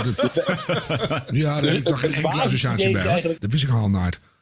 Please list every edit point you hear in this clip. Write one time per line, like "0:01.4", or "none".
0:03.4